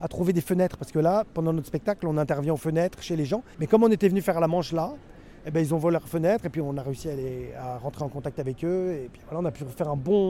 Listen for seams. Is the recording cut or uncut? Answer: cut